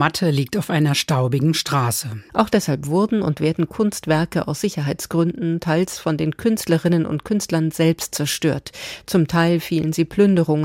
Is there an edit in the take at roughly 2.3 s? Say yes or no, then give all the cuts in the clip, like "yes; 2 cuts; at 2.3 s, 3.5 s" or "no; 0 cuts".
yes; 1 cut; at 2.3 s